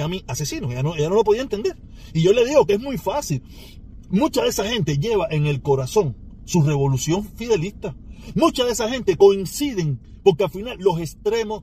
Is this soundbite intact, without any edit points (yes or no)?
yes